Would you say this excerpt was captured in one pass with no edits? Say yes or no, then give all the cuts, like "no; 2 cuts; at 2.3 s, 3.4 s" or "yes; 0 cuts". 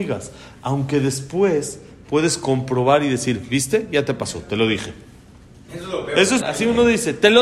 no; 1 cut; at 6.4 s